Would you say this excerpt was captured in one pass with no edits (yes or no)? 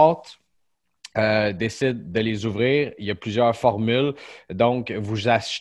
yes